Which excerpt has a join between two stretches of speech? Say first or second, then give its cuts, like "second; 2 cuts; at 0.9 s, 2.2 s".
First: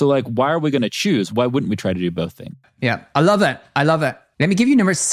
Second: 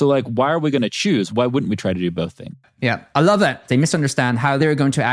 second; 1 cut; at 3.7 s